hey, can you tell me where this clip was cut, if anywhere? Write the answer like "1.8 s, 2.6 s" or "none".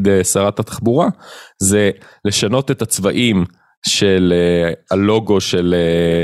none